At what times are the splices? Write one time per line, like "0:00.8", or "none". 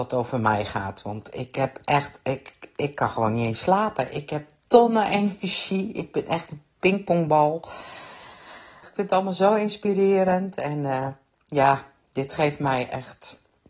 0:08.8